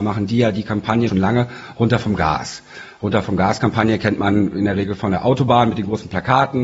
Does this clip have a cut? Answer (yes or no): yes